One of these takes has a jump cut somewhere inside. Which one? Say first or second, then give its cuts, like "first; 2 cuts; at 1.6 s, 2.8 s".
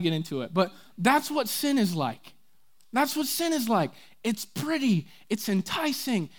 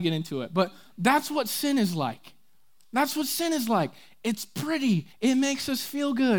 second; 1 cut; at 5.1 s